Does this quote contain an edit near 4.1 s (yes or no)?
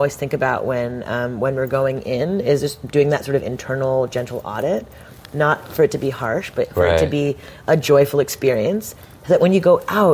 no